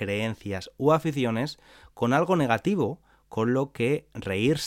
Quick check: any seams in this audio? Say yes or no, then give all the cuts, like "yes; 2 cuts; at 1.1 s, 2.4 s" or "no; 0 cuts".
no; 0 cuts